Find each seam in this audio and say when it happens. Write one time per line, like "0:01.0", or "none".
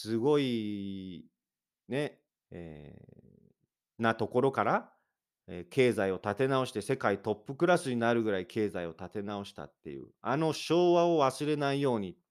0:02.3